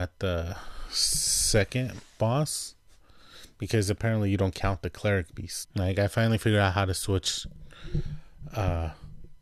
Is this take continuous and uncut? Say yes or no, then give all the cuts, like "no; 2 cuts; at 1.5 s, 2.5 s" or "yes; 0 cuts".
no; 1 cut; at 5.6 s